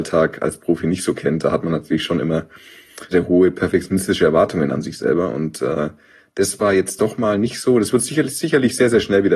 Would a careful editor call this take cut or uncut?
cut